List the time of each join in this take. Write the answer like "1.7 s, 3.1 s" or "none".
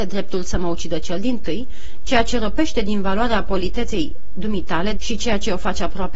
4.9 s